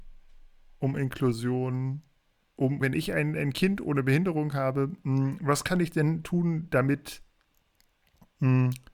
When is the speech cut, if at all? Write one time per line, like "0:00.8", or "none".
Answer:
0:02.8